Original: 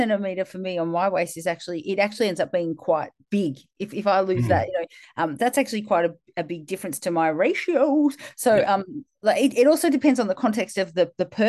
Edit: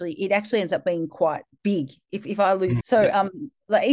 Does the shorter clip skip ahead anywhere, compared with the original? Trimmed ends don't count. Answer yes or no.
yes